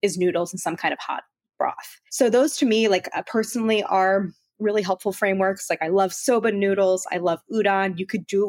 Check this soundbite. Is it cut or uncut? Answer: uncut